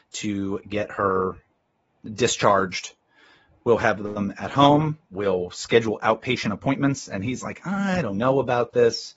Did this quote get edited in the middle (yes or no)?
no